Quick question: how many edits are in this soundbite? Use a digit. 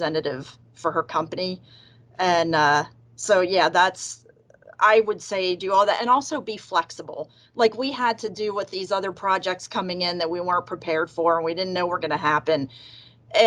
0